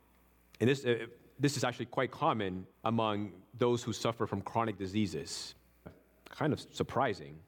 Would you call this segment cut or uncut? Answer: cut